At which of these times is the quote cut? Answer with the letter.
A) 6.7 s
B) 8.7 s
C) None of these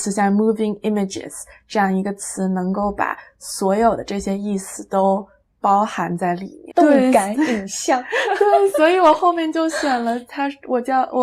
A